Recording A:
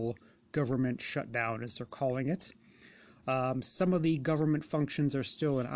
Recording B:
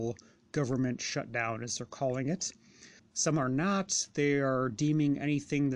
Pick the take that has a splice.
B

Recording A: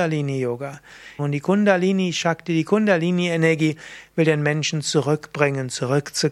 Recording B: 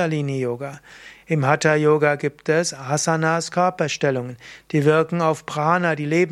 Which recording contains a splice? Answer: A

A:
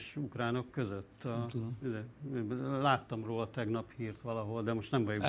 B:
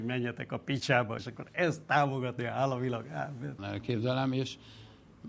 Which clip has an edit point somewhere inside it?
B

